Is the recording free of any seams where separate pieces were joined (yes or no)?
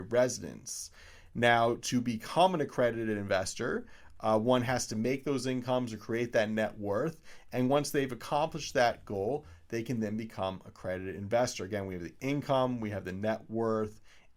yes